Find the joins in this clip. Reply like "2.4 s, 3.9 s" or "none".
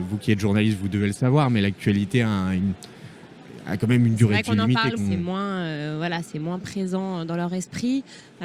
5.0 s